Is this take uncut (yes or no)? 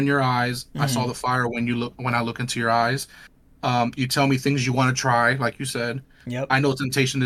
yes